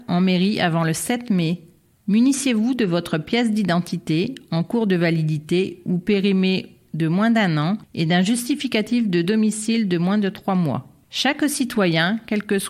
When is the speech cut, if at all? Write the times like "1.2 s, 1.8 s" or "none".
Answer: none